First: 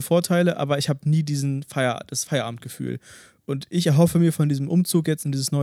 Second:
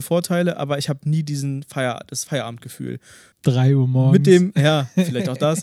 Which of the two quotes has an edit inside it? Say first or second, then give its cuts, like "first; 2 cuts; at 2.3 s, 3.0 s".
second; 1 cut; at 3.3 s